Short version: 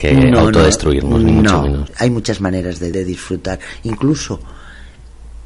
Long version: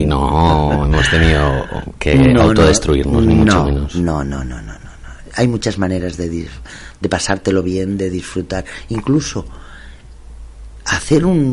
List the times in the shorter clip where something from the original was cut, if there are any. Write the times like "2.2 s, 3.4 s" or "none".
1.9 s, 2.9 s